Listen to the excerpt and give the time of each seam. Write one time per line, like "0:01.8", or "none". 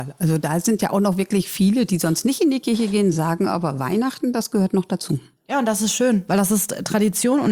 none